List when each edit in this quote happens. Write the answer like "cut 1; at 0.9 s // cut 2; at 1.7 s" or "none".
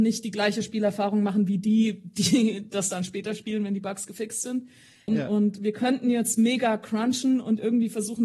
cut 1; at 5.1 s